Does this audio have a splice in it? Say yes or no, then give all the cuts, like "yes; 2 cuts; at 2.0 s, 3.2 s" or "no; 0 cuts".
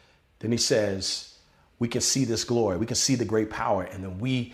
no; 0 cuts